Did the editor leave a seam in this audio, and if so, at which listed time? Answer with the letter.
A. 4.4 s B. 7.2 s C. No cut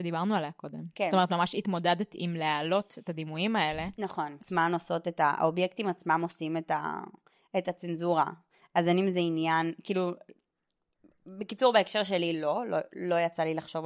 A